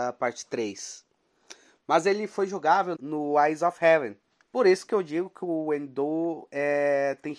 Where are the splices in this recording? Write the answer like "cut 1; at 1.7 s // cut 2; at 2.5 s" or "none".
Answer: cut 1; at 2.9 s // cut 2; at 4.4 s